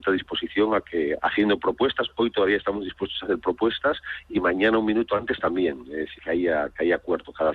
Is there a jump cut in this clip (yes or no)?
yes